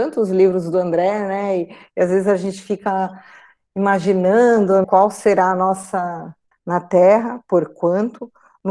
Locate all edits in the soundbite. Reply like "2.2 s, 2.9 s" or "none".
4.8 s, 6.5 s